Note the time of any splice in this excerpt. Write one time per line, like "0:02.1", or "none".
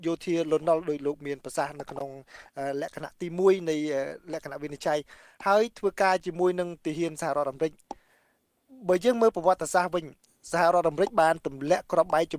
none